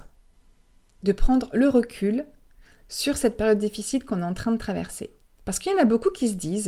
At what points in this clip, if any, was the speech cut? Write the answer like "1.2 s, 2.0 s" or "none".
none